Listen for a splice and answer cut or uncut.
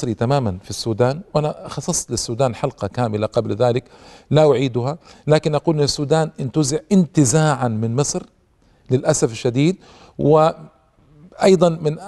uncut